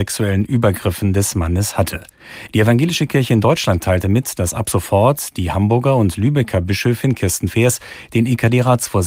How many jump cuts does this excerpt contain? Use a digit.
0